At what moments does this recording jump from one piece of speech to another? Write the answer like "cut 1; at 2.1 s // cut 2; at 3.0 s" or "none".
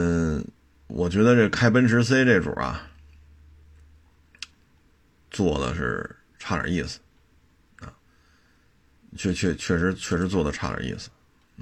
none